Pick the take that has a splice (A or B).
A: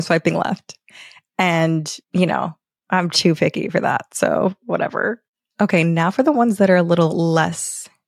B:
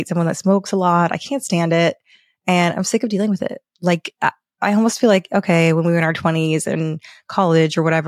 A